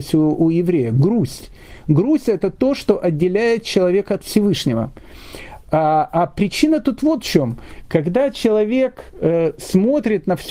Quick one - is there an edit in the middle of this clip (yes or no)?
no